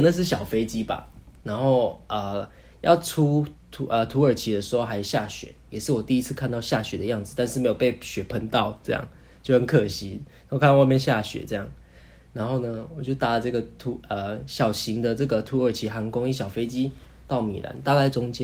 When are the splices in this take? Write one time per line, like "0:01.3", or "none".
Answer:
none